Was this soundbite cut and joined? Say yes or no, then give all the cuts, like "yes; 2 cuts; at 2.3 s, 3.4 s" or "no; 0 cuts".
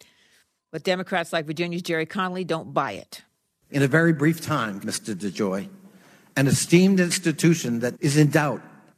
yes; 2 cuts; at 4.8 s, 7.9 s